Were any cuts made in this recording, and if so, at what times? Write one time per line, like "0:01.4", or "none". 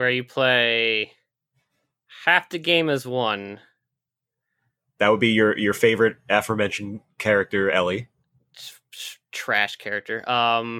none